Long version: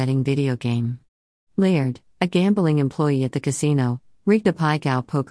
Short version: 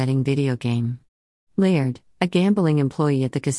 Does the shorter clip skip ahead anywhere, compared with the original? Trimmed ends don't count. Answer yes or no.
no